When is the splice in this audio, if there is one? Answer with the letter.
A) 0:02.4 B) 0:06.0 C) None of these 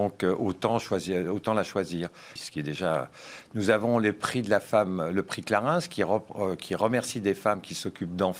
A